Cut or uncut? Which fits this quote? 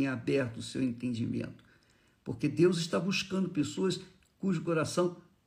uncut